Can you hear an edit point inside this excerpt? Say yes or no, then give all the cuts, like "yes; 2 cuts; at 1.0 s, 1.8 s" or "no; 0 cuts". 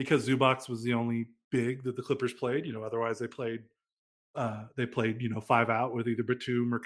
no; 0 cuts